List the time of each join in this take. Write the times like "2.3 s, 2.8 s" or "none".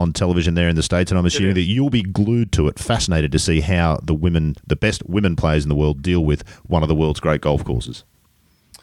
none